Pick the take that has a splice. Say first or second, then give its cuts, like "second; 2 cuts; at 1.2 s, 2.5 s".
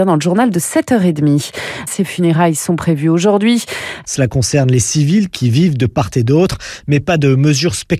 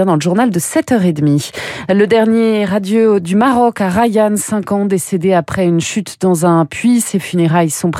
first; 2 cuts; at 1.9 s, 4.0 s